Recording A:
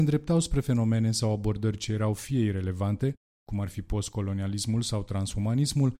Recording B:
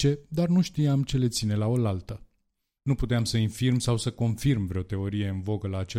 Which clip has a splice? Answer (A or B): B